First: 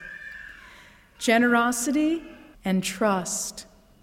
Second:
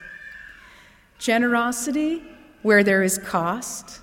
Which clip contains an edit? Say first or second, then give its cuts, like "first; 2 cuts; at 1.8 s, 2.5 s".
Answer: first; 1 cut; at 2.5 s